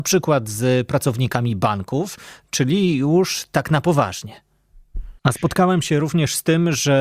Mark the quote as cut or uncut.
cut